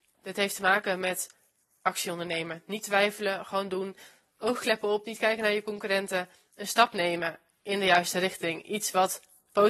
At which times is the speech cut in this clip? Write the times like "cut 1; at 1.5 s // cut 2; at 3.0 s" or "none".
none